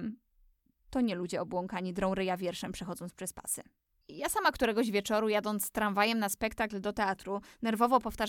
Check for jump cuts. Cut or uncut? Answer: cut